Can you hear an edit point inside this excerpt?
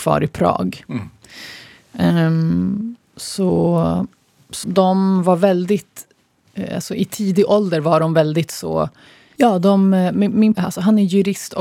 yes; 3 cuts; at 4.6 s, 9.4 s, 10.5 s

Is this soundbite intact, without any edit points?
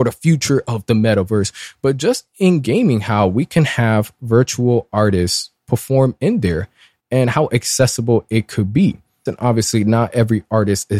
no; 1 cut; at 9.3 s

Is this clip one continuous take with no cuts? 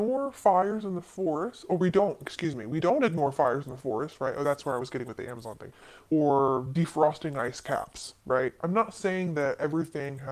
no; 2 cuts; at 6.1 s, 8.6 s

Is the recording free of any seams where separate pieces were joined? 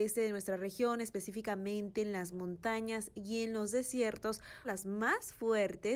no; 1 cut; at 4.6 s

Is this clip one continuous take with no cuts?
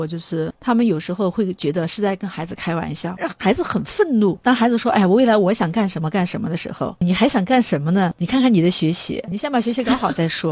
no; 2 cuts; at 4.4 s, 7.0 s

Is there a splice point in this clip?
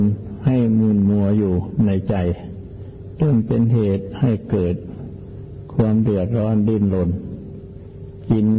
no; 0 cuts

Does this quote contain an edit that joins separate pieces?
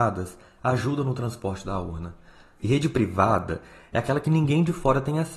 yes; 1 cut; at 2.6 s

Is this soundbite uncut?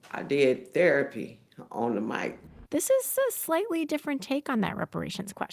no; 1 cut; at 2.7 s

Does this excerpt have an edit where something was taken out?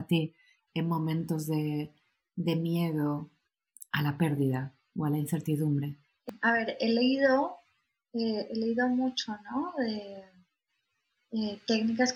no; 0 cuts

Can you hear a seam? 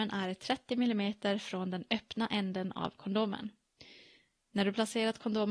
no; 0 cuts

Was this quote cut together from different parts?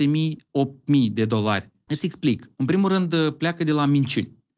yes; 1 cut; at 1.9 s

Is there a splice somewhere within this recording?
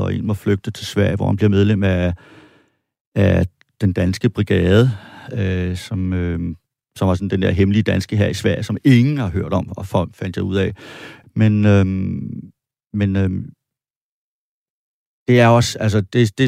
yes; 1 cut; at 11.2 s

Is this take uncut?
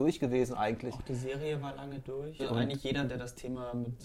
no; 1 cut; at 2.4 s

